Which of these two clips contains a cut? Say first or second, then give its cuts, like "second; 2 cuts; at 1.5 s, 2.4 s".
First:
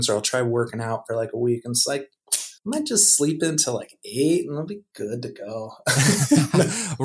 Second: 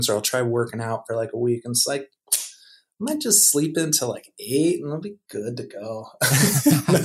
first; 1 cut; at 2.6 s